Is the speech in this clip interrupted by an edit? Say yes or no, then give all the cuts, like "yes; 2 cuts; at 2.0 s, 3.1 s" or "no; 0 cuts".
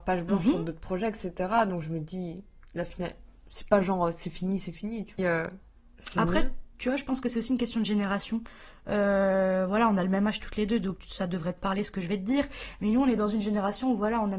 yes; 1 cut; at 5.2 s